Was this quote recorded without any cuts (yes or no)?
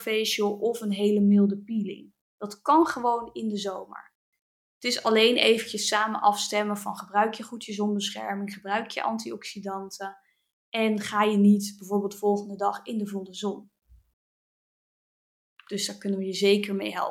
no